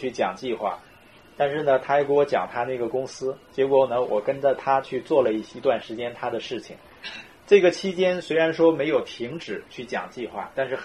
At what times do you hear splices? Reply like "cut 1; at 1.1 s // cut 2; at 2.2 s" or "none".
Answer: none